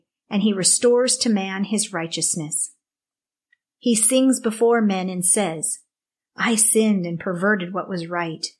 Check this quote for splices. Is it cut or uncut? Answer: uncut